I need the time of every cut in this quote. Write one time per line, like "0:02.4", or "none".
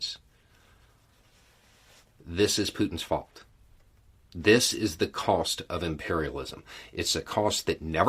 none